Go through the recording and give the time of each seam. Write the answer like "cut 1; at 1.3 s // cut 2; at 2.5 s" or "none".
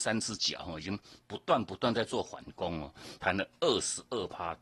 cut 1; at 3.2 s